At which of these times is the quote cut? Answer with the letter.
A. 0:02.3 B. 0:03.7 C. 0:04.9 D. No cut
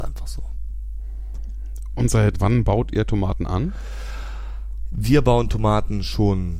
A